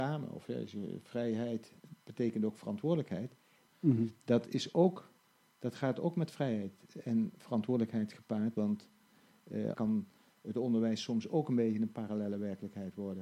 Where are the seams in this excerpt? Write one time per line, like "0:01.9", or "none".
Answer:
0:03.7
0:08.5
0:09.7